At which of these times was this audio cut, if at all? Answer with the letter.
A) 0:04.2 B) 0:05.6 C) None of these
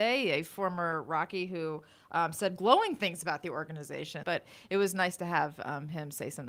A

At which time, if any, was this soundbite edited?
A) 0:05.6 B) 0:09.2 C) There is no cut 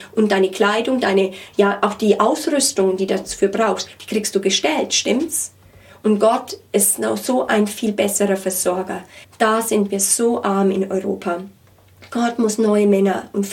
B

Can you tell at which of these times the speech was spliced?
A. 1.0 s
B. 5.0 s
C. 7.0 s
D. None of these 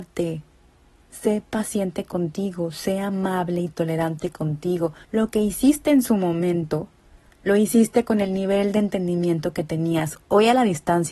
B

